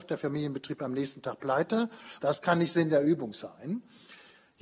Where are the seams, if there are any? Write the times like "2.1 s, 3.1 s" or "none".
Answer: 2.2 s